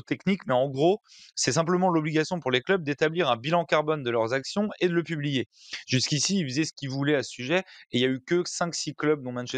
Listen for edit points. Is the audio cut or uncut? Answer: uncut